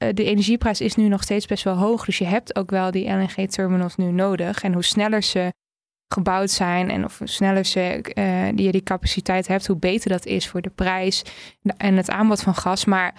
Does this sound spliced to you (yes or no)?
no